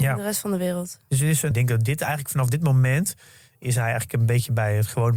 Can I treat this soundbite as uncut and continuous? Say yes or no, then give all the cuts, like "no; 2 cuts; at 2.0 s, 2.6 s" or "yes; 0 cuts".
no; 1 cut; at 1.5 s